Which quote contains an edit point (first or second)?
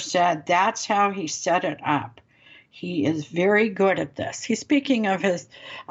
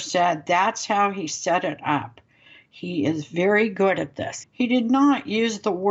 second